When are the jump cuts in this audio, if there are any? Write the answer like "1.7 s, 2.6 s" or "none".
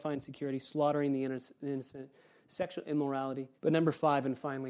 3.6 s